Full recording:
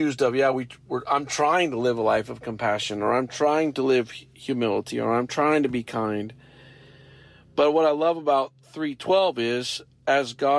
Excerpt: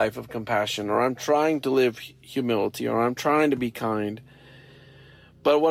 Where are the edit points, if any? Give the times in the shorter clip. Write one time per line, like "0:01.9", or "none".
none